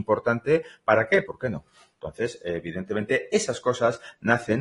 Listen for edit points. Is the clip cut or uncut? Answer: cut